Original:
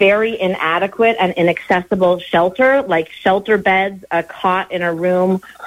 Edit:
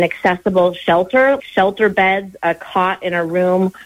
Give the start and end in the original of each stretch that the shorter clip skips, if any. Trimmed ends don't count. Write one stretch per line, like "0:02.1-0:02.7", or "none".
0:02.8-0:03.1